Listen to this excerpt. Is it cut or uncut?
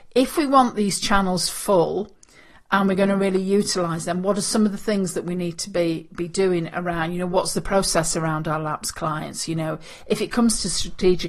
uncut